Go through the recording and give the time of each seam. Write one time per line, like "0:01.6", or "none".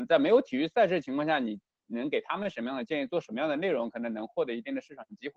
none